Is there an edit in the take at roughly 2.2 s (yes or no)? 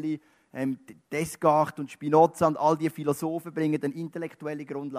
no